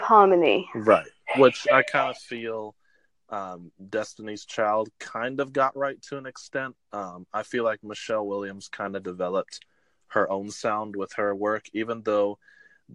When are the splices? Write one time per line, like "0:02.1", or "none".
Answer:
none